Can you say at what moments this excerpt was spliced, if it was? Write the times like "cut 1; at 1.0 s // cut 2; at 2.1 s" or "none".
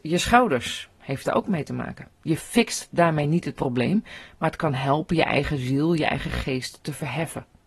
cut 1; at 2.1 s